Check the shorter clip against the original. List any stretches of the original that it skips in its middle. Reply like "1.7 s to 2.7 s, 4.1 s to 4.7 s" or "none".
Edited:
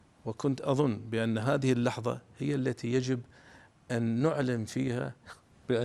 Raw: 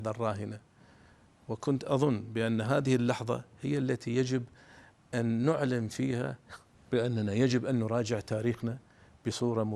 none